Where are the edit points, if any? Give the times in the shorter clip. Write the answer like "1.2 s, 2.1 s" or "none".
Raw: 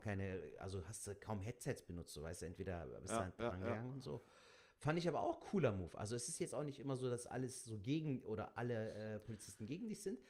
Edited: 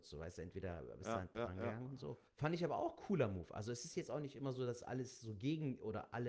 2.3 s